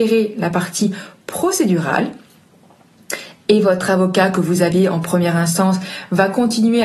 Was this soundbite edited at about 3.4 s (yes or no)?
no